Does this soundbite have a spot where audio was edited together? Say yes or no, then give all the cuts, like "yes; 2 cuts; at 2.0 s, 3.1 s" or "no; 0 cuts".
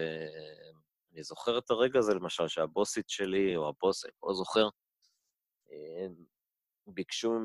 no; 0 cuts